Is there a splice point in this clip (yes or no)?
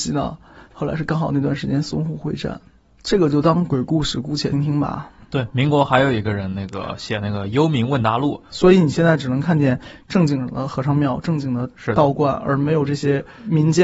yes